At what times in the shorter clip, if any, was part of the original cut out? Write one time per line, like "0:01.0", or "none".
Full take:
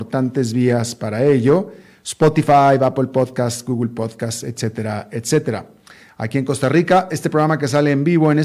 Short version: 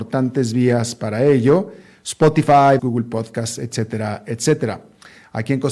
0:02.8